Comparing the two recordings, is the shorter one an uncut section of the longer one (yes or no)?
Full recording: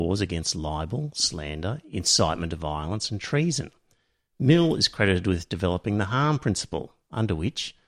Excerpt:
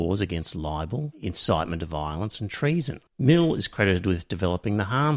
no